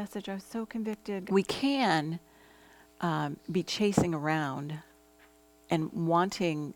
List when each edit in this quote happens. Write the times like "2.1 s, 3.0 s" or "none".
1.3 s